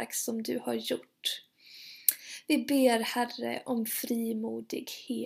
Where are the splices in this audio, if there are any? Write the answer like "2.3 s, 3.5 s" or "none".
none